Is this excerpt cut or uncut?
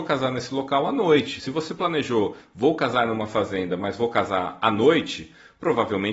uncut